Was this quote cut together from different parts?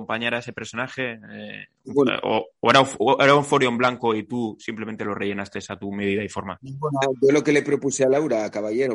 no; 0 cuts

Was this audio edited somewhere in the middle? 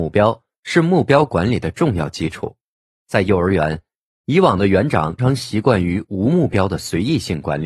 yes; 1 cut; at 5.2 s

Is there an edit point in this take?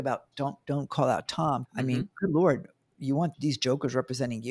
yes; 2 cuts; at 1.7 s, 3.3 s

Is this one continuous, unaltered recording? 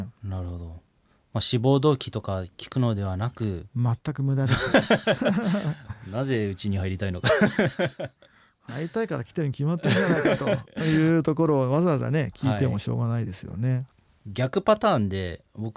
yes; 0 cuts

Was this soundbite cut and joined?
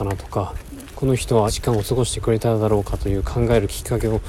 yes; 1 cut; at 1.5 s

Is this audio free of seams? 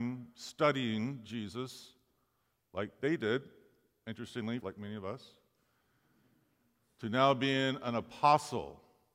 no; 1 cut; at 4.6 s

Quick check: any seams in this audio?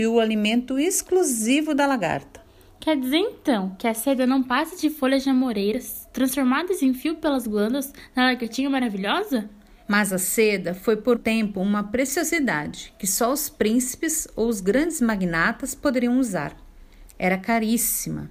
yes; 2 cuts; at 9.8 s, 11.2 s

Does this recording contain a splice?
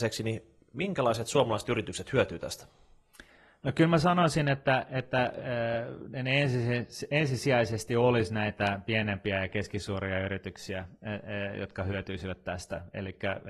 no; 0 cuts

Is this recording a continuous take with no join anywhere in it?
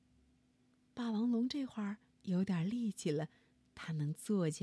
yes; 0 cuts

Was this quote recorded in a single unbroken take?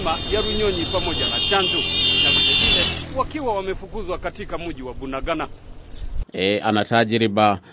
no; 1 cut; at 6.2 s

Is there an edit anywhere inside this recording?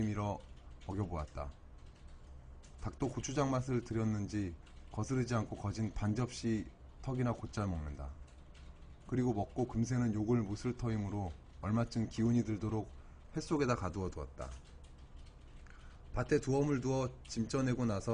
no; 0 cuts

